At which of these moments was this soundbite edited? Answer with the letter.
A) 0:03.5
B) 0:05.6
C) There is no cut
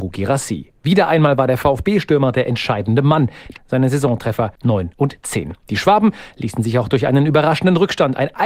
A